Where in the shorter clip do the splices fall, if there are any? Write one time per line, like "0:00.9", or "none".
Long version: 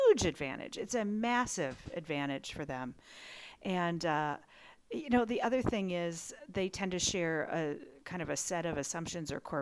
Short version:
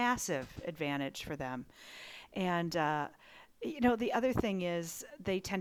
none